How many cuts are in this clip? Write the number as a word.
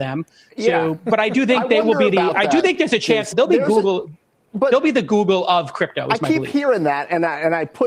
one